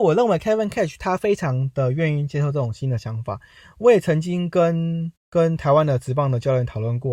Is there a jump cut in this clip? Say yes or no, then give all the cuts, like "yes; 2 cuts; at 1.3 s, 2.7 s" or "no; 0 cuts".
yes; 1 cut; at 5.2 s